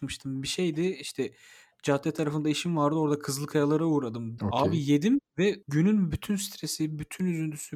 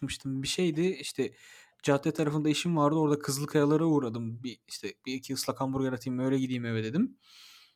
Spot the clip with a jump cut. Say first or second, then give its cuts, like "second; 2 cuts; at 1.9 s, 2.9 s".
first; 2 cuts; at 4.4 s, 5.6 s